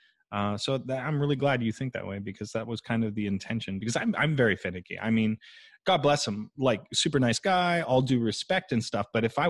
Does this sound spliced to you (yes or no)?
no